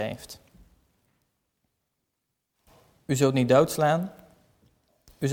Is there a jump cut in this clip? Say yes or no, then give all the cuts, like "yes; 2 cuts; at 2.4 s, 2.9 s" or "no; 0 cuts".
no; 0 cuts